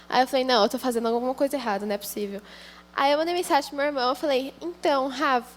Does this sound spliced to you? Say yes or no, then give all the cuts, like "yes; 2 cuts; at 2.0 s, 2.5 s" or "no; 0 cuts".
no; 0 cuts